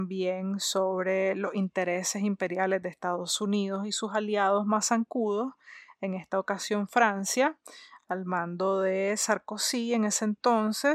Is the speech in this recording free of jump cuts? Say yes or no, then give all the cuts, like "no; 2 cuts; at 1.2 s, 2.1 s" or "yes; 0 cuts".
yes; 0 cuts